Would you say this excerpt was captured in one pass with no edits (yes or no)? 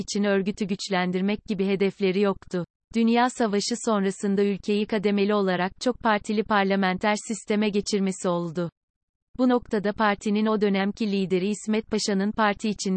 no